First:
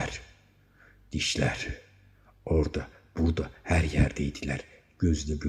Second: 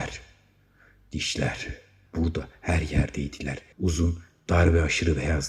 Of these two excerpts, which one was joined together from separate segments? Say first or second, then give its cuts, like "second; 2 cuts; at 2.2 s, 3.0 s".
second; 2 cuts; at 2.1 s, 3.7 s